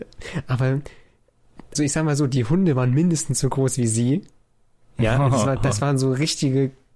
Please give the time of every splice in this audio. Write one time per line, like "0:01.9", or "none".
0:01.8